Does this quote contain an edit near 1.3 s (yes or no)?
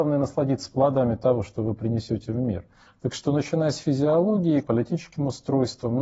no